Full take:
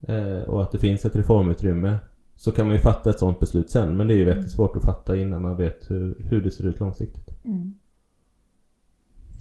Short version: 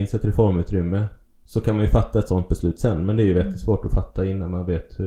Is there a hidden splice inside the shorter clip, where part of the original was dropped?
no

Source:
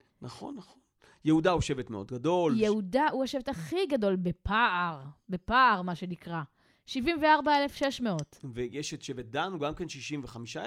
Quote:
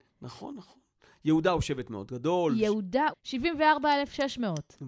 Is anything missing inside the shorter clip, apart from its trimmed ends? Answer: yes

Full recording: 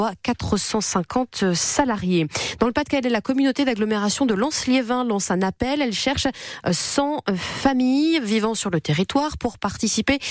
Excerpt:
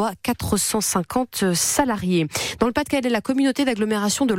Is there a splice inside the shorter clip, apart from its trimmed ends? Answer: no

